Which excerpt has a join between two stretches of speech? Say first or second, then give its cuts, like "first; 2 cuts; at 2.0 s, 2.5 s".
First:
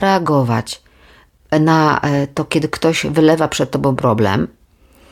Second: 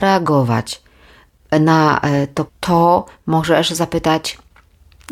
second; 1 cut; at 2.5 s